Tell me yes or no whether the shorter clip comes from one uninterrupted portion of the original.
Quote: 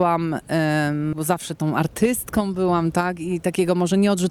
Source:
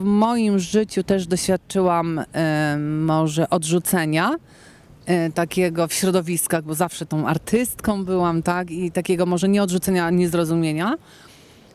no